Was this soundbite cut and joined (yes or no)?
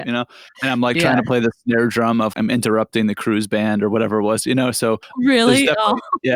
yes